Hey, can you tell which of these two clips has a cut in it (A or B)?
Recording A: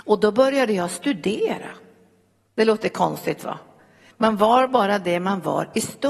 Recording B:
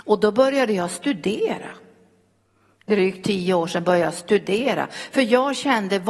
A